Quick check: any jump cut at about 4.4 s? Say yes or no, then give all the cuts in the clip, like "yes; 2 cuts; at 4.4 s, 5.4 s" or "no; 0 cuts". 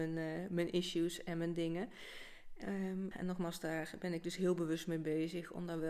no; 1 cut; at 3.1 s